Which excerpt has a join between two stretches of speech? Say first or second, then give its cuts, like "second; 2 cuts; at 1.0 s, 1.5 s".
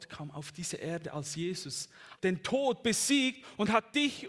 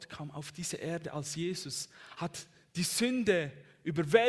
first; 1 cut; at 2.2 s